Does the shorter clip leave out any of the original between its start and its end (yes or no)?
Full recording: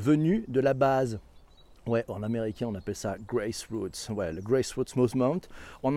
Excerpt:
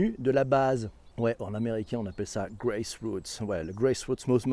yes